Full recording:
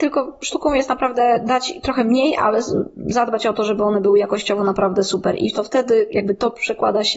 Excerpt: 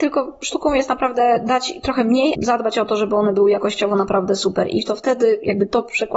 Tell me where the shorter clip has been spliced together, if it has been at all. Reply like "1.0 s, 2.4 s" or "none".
2.3 s